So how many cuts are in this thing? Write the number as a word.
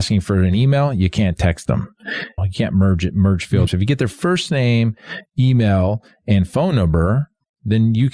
two